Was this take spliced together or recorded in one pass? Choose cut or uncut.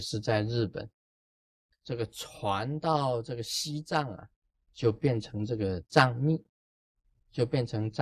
cut